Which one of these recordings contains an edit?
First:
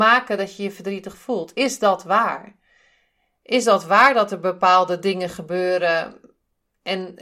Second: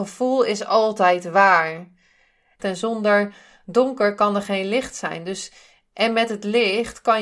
second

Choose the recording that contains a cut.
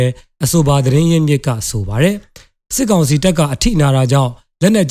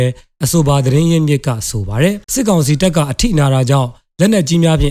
second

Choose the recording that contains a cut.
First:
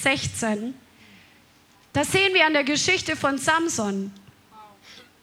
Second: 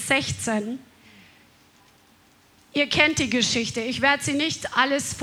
first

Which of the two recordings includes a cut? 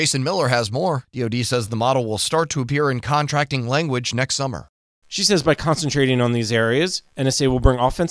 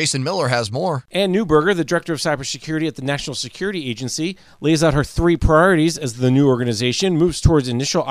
first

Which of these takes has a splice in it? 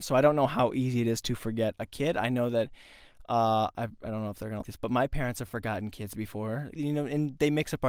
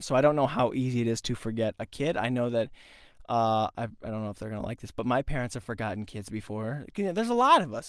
first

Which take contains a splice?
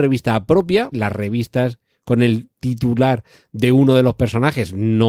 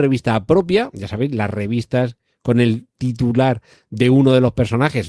first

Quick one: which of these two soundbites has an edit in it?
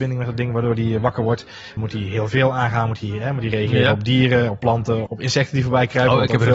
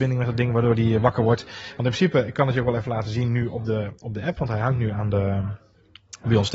first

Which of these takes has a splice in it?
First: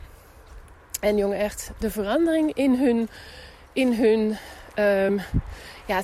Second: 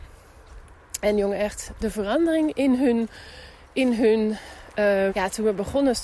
second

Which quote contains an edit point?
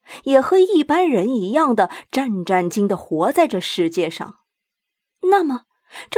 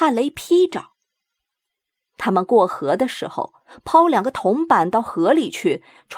first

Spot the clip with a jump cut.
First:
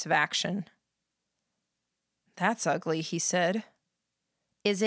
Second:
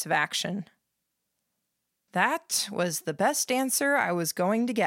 second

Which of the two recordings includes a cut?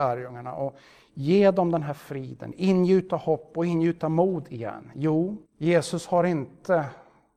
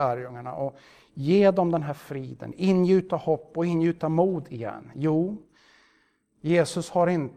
first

